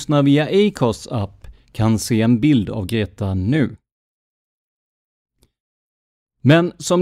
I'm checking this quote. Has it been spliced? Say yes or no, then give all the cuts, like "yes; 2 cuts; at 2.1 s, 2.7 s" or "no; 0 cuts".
no; 0 cuts